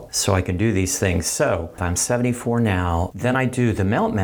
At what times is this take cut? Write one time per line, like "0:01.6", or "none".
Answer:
0:01.8
0:03.1